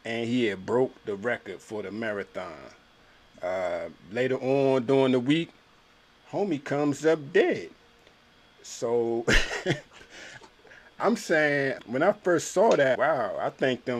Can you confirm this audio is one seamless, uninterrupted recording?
no; 2 cuts; at 11.8 s, 12.9 s

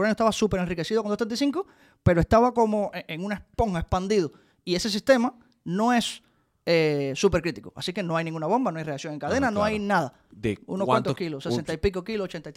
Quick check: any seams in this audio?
yes; 1 cut; at 10.3 s

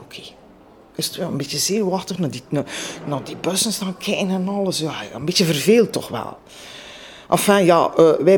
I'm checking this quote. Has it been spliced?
no; 0 cuts

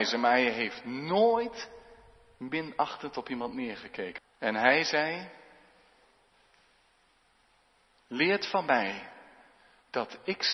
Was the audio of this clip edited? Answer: yes; 1 cut; at 4.2 s

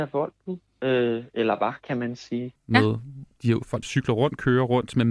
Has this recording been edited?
yes; 2 cuts; at 2.6 s, 3.8 s

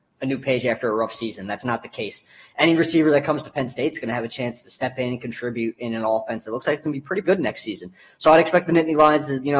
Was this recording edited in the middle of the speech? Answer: yes; 1 cut; at 7.2 s

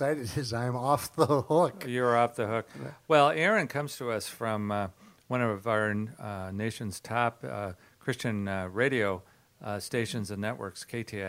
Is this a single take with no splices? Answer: yes; 0 cuts

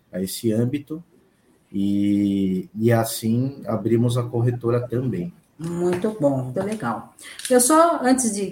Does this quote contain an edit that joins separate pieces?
yes; 2 cuts; at 5.4 s, 6.5 s

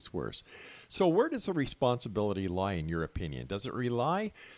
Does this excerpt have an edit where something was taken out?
no; 0 cuts

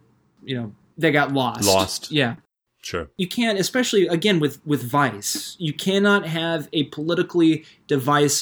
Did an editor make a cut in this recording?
no; 0 cuts

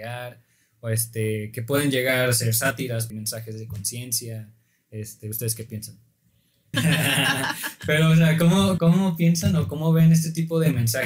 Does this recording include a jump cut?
yes; 3 cuts; at 3.1 s, 6.7 s, 8.8 s

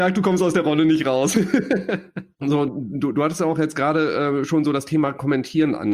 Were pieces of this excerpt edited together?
no; 0 cuts

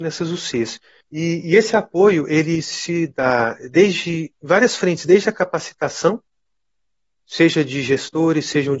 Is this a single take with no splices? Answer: no; 1 cut; at 1.0 s

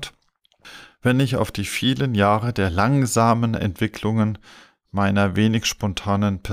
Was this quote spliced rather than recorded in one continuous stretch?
no; 0 cuts

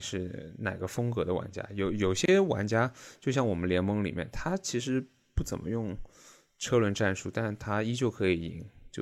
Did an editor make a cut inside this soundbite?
no; 0 cuts

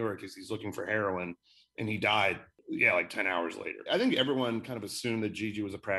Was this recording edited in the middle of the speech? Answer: yes; 1 cut; at 3.9 s

